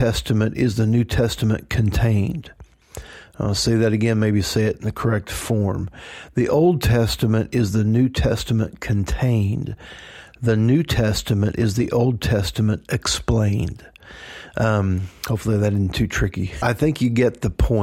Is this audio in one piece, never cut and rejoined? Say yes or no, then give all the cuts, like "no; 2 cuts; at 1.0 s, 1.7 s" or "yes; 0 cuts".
no; 1 cut; at 16.6 s